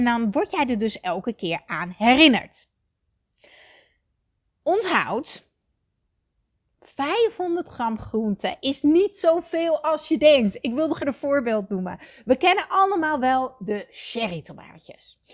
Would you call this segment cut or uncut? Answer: cut